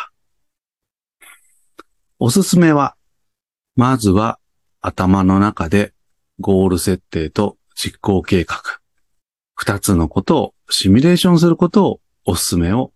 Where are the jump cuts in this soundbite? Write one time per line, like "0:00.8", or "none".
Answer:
none